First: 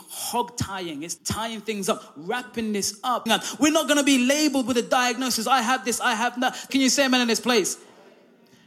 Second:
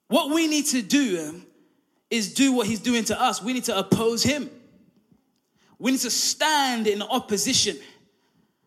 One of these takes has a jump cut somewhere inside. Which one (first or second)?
first